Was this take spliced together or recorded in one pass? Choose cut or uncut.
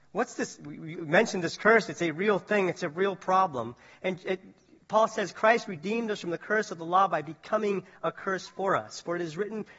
uncut